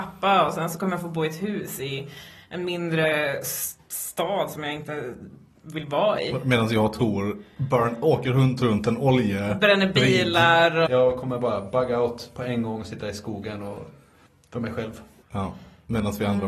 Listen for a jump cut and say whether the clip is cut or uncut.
cut